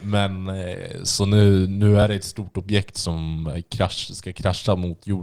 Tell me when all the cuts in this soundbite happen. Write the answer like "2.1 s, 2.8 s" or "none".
none